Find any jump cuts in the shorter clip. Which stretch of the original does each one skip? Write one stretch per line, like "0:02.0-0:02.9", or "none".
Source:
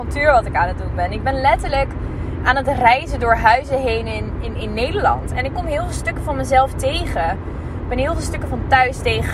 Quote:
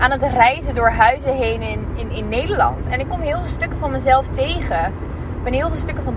none